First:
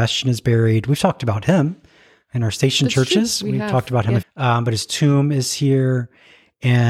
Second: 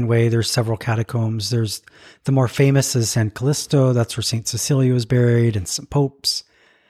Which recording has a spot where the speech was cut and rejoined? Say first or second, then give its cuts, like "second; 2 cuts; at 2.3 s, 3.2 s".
first; 1 cut; at 4.2 s